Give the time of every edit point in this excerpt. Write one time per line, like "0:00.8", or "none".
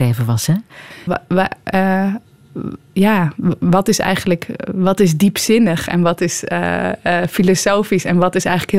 0:01.1